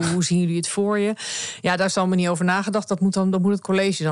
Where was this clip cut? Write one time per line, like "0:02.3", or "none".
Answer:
none